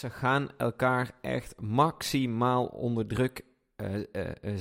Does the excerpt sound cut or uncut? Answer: uncut